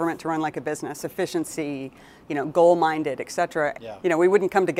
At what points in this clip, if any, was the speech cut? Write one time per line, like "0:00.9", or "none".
0:01.0
0:03.7